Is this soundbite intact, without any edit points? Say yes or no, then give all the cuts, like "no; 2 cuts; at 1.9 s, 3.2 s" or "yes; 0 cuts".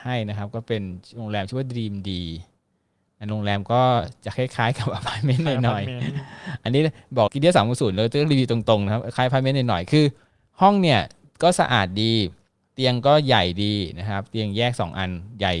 no; 1 cut; at 7.3 s